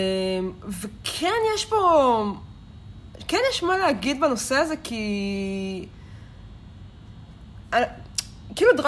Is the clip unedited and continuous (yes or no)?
yes